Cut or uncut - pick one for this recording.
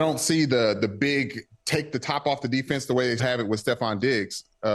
cut